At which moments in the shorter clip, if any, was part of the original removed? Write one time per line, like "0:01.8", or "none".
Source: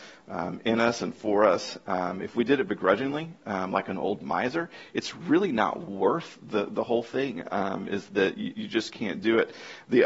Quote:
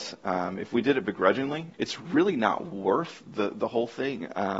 0:01.7